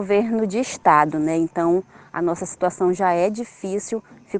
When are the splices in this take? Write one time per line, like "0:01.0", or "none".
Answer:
none